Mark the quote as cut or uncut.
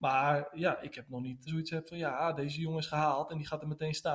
cut